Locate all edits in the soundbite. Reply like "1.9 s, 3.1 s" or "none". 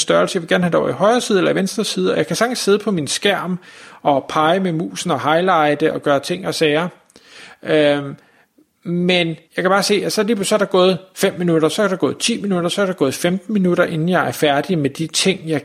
9.4 s